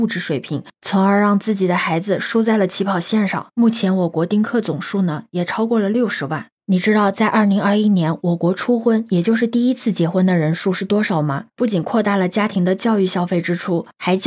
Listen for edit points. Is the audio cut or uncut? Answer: cut